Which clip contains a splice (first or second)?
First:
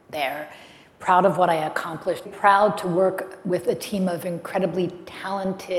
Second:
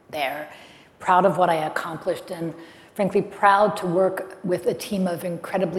first